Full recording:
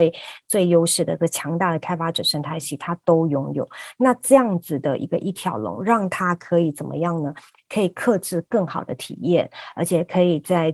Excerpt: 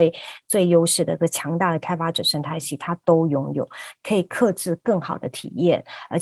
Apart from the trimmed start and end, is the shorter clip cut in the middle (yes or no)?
yes